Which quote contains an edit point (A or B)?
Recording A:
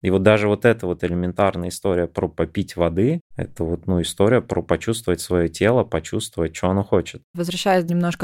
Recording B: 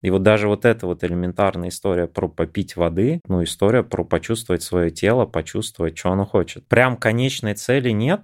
B